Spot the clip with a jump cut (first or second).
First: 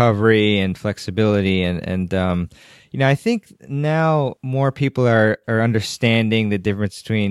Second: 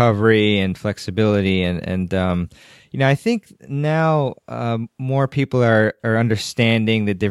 first